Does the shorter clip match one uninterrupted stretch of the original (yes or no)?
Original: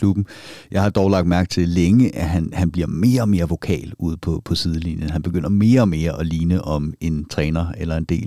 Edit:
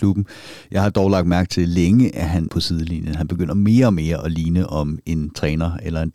no